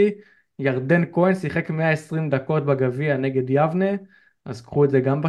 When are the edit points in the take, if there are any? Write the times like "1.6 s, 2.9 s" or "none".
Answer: none